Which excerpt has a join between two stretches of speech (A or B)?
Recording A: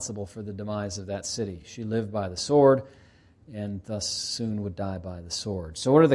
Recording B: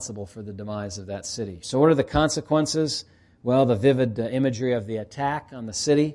B